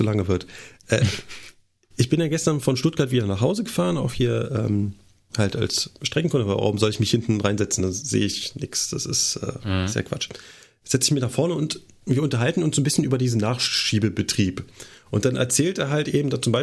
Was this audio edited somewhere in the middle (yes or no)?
no